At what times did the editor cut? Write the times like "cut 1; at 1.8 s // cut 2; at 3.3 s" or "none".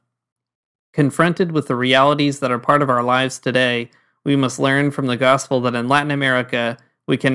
none